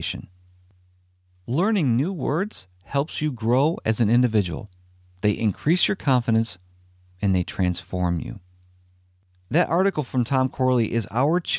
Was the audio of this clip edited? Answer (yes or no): no